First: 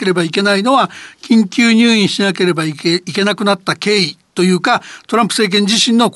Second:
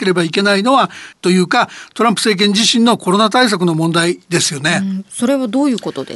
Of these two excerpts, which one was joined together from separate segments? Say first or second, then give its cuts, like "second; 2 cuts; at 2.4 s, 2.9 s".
second; 1 cut; at 1.1 s